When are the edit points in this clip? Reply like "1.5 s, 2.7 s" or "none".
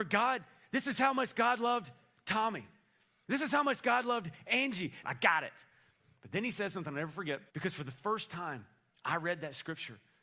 5.0 s, 7.5 s